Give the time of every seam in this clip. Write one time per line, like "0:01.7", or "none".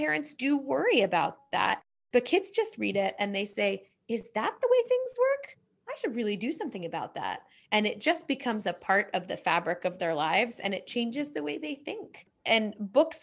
none